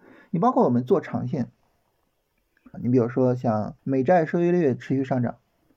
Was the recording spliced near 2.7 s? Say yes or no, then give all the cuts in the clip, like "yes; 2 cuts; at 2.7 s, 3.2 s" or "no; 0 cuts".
yes; 2 cuts; at 2.7 s, 3.8 s